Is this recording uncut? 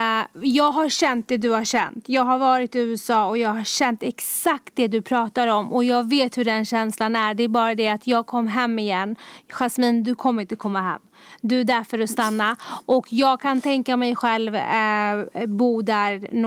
yes; 0 cuts

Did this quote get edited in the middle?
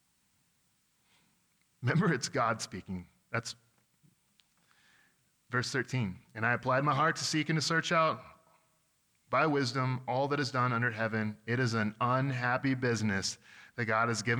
no; 0 cuts

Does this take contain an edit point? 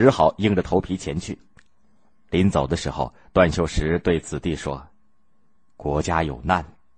no; 0 cuts

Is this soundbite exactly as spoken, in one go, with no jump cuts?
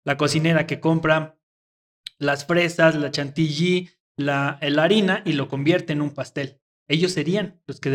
yes; 0 cuts

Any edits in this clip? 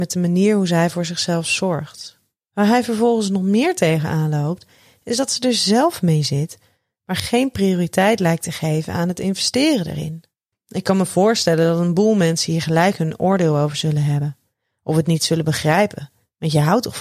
yes; 2 cuts; at 2.4 s, 10.5 s

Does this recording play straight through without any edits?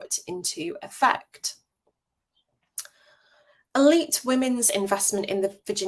yes; 0 cuts

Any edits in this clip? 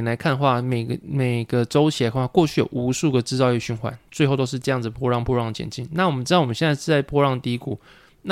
no; 0 cuts

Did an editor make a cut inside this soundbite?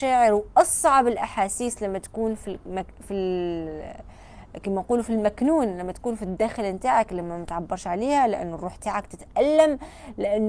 no; 0 cuts

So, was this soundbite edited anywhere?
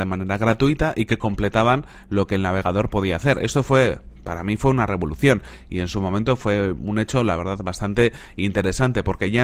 no; 0 cuts

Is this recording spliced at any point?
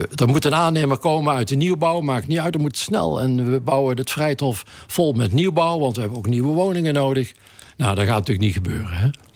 no; 0 cuts

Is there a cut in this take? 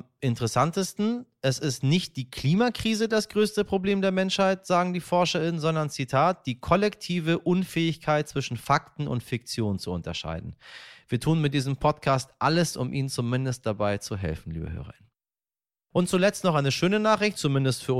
no; 0 cuts

